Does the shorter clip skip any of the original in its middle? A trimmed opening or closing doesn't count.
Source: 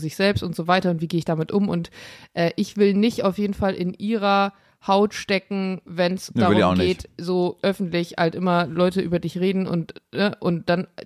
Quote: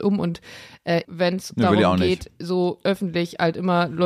yes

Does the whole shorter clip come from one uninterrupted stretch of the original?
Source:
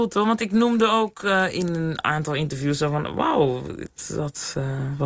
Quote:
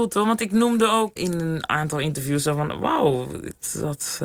no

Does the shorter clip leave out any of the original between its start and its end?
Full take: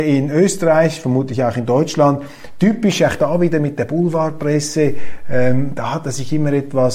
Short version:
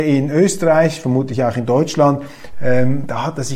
yes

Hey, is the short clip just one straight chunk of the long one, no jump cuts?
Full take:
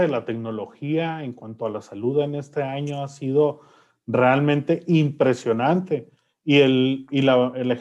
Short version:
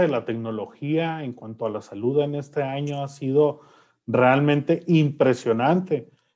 yes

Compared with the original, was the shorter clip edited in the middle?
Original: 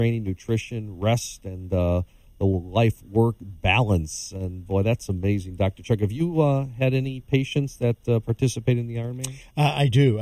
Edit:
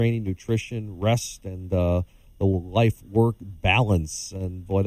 no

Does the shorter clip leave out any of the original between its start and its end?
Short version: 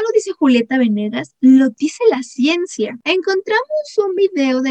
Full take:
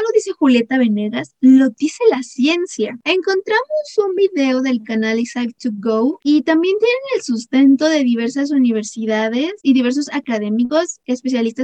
no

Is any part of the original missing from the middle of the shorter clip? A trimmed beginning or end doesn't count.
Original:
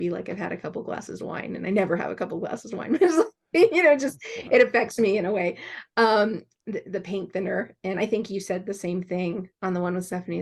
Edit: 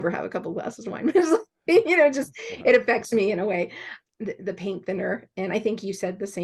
yes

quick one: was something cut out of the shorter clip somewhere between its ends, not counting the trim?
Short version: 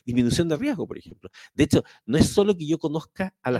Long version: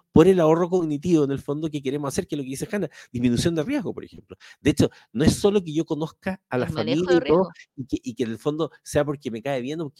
no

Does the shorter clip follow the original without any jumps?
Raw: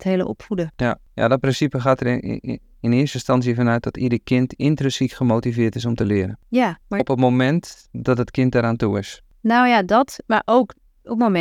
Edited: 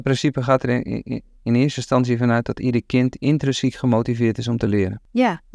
yes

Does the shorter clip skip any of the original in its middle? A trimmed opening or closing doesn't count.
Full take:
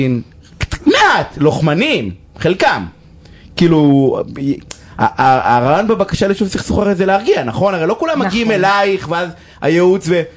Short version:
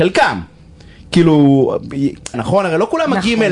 yes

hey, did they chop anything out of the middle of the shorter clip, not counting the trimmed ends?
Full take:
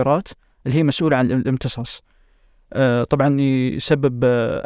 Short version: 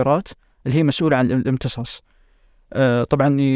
no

